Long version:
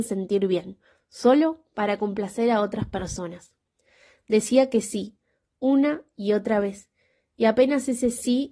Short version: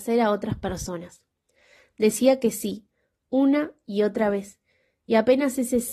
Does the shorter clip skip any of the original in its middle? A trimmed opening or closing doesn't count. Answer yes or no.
no